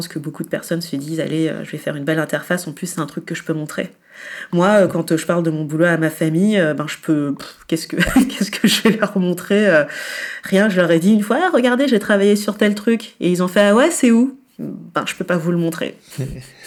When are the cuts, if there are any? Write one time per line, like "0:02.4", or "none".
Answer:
none